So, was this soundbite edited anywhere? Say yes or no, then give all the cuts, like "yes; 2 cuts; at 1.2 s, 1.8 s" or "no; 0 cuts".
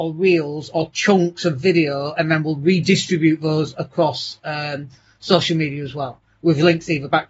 no; 0 cuts